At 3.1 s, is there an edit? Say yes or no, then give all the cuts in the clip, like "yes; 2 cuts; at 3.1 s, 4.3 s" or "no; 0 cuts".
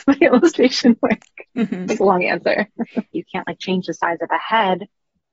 yes; 1 cut; at 3.1 s